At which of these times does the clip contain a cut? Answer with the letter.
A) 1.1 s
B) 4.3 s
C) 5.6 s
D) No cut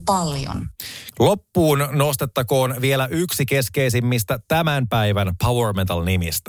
A